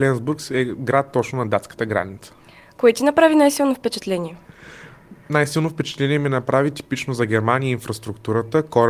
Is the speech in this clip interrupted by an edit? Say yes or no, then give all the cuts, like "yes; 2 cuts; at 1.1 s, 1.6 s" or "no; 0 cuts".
no; 0 cuts